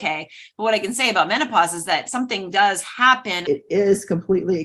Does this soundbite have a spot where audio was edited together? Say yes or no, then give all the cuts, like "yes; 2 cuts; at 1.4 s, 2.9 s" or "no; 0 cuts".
yes; 1 cut; at 3.4 s